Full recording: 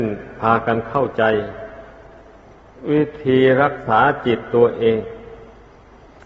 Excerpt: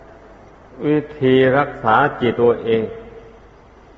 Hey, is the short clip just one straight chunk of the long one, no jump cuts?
no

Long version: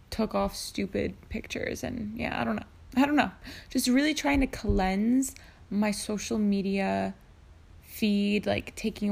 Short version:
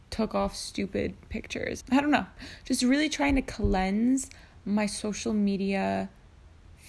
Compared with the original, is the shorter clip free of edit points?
no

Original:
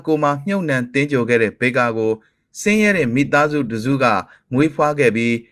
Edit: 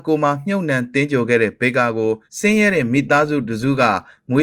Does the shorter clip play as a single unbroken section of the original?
no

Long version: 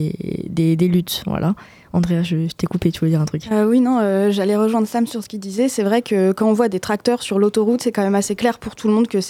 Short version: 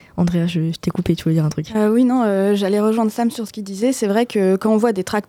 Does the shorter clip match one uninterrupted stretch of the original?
yes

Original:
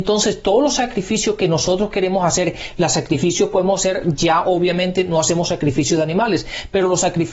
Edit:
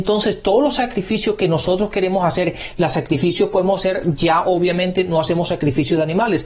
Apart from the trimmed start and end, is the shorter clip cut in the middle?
no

